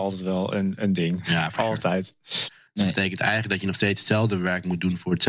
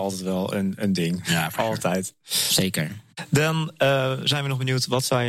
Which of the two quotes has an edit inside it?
first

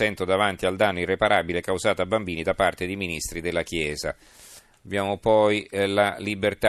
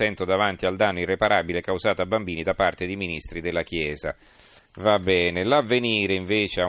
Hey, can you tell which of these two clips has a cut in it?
second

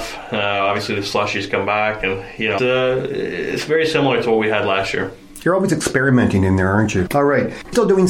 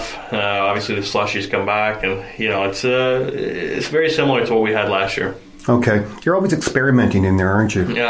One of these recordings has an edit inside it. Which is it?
first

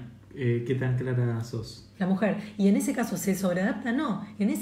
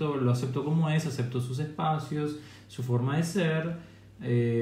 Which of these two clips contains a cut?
first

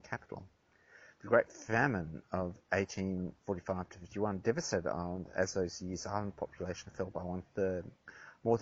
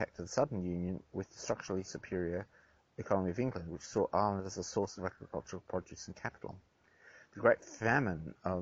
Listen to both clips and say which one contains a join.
second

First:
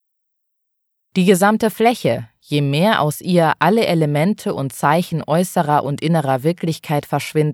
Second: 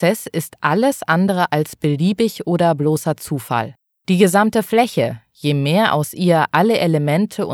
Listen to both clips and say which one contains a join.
second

